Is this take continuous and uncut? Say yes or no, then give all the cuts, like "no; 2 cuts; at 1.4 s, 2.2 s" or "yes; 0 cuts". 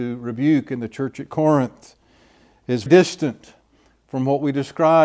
no; 1 cut; at 2.9 s